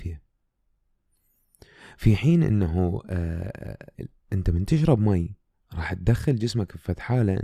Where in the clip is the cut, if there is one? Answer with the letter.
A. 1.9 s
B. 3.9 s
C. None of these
B